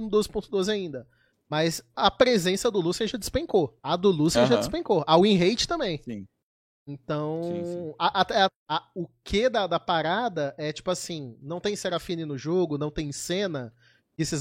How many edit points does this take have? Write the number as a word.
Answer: three